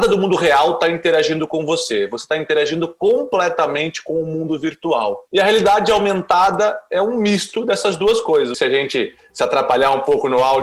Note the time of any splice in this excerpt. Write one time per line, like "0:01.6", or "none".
0:05.3
0:08.5